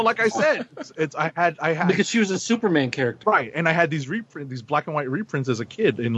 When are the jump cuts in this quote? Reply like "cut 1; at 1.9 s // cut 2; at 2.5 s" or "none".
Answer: cut 1; at 3.2 s

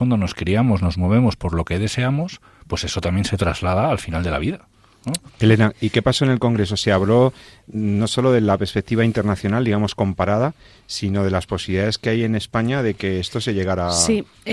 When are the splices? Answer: none

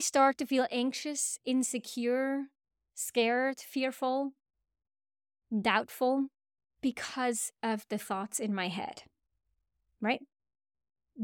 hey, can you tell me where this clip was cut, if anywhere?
none

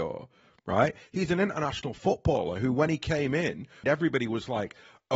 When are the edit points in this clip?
cut 1; at 1.1 s // cut 2; at 3.8 s

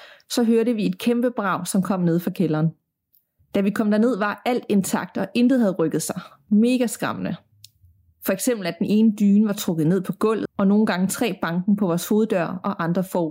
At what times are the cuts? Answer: cut 1; at 3.4 s // cut 2; at 8.1 s // cut 3; at 10.5 s

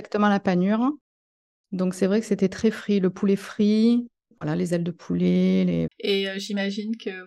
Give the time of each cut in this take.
cut 1; at 5.9 s

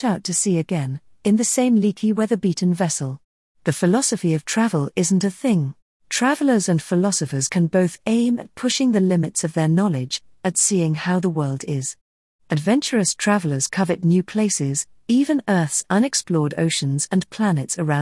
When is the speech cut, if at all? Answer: cut 1; at 5.9 s

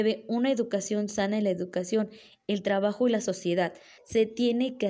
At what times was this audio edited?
cut 1; at 4.0 s

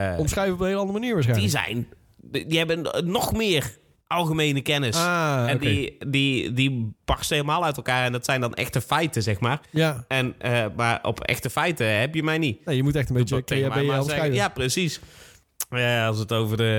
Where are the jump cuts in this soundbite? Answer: none

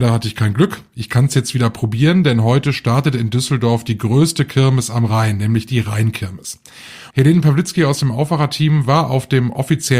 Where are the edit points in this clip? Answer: cut 1; at 7.1 s

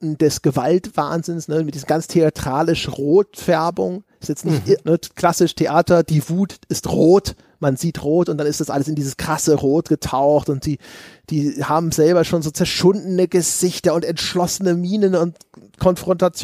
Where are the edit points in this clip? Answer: cut 1; at 4.8 s

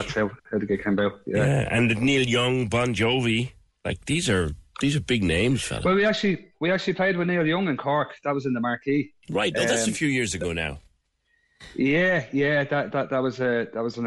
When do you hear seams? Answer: none

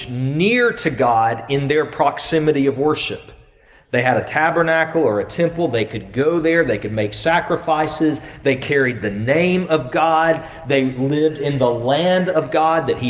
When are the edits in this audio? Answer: none

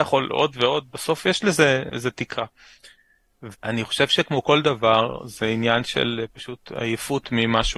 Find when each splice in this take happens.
cut 1; at 3.5 s

